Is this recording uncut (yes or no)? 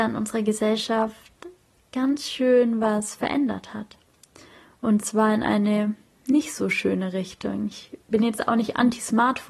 yes